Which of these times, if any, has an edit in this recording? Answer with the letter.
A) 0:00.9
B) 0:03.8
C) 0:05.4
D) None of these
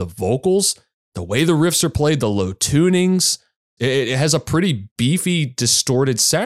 B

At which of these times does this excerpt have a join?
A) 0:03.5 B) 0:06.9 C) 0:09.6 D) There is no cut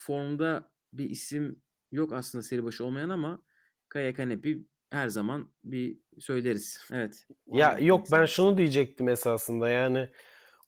B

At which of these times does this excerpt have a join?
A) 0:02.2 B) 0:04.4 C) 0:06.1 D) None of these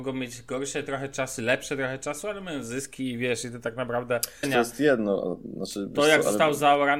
B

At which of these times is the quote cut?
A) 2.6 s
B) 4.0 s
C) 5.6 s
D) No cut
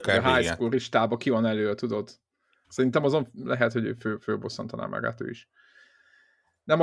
A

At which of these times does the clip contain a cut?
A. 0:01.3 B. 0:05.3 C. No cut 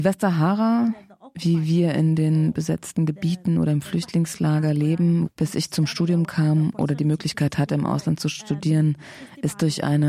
B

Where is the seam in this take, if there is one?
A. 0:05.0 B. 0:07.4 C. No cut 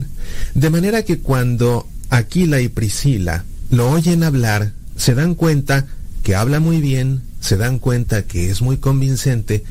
C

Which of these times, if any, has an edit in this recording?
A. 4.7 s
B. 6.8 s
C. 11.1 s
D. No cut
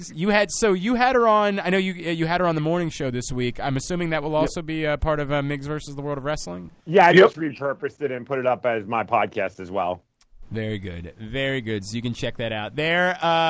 B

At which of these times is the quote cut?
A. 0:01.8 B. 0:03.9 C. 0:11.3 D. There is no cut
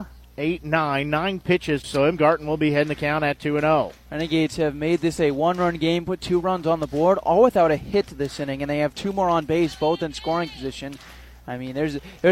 A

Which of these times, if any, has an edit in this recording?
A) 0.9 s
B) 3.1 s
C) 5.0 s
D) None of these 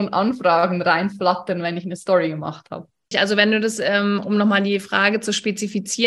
B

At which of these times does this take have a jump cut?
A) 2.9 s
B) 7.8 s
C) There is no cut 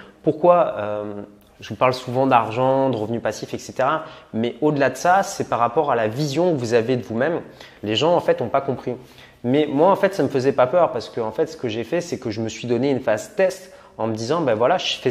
B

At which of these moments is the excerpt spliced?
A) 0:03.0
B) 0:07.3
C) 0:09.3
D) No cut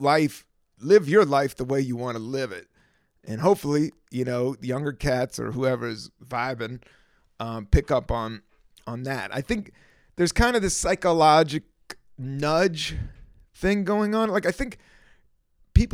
D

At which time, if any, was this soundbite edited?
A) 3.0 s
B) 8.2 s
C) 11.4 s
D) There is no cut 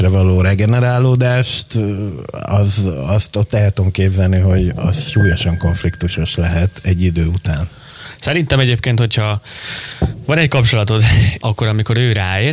C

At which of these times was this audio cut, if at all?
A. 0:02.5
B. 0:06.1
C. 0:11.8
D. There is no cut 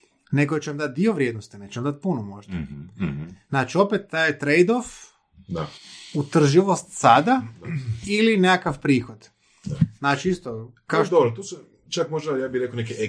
D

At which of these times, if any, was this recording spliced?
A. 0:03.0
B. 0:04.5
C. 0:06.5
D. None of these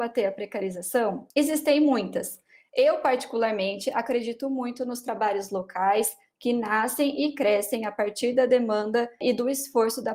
D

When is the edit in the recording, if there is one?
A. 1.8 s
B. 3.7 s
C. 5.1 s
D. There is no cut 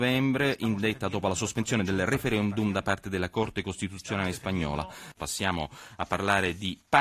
C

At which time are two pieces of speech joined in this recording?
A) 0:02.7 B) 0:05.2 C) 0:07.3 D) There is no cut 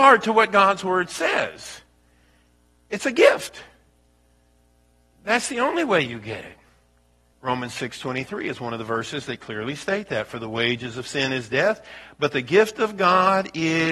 C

